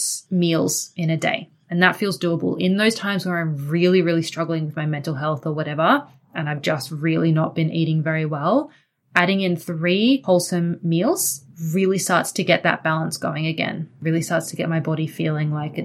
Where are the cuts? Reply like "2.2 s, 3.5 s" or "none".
none